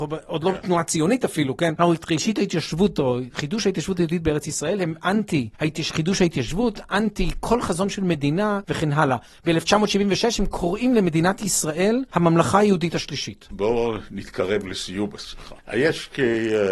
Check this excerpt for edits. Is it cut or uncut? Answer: cut